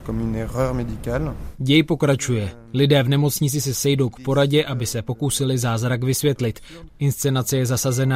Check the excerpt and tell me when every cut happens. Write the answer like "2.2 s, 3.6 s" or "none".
6.9 s